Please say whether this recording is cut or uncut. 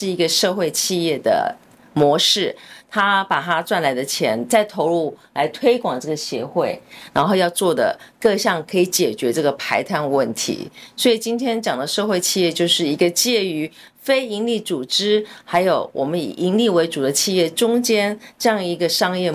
uncut